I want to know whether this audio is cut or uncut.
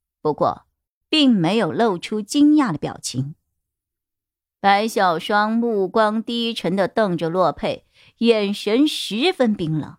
uncut